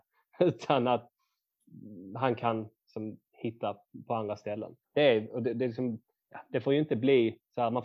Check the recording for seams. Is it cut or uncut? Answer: cut